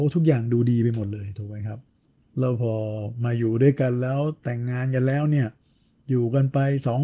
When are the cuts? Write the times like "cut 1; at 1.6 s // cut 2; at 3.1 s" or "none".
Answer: none